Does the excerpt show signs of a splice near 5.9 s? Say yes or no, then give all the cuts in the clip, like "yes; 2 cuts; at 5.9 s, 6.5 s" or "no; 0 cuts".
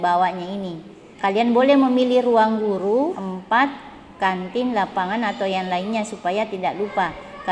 no; 2 cuts; at 1.1 s, 3.1 s